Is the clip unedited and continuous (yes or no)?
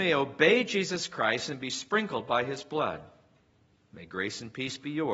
yes